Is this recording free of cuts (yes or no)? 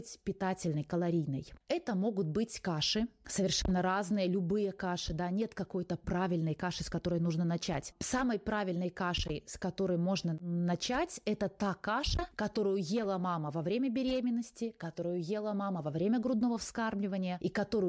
no